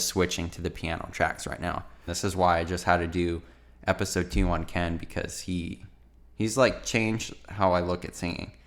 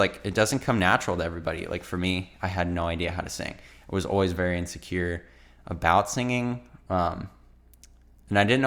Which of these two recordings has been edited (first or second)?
first